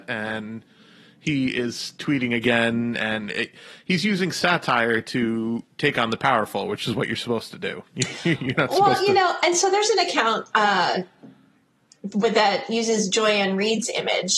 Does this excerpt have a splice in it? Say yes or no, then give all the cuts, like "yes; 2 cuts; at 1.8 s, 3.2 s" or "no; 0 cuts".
no; 0 cuts